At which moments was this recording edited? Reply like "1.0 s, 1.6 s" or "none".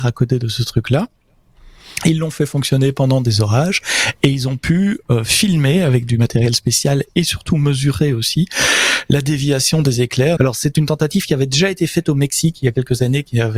10.4 s